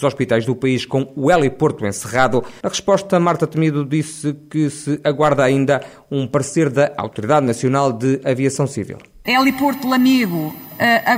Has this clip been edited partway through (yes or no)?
yes